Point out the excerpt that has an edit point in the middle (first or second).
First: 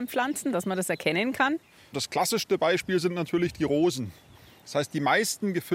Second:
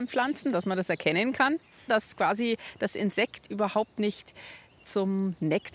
second